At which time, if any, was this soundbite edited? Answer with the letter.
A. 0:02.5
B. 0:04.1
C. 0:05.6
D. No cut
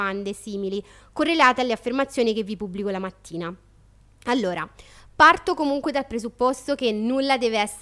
D